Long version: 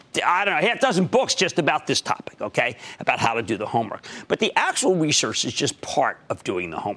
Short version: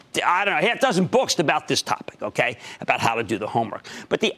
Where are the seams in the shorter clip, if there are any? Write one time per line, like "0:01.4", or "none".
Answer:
0:01.4